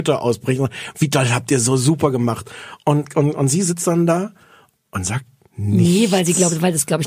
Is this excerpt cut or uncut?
uncut